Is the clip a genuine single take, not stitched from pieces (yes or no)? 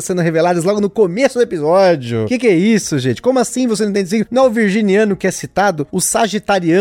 yes